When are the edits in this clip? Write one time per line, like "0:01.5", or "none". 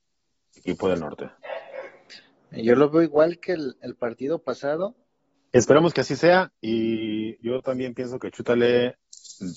0:05.5